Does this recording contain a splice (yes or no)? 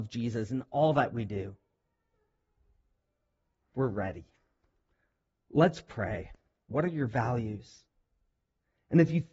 yes